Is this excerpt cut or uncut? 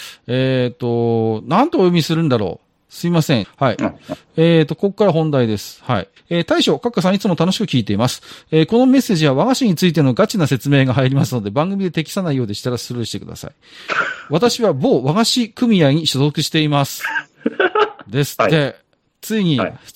cut